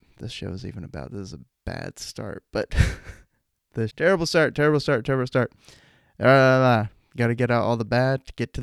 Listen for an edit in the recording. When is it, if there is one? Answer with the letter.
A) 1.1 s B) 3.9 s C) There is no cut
B